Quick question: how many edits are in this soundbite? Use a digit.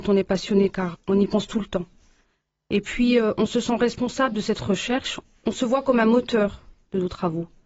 1